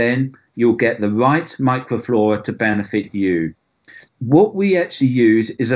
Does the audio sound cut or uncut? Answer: cut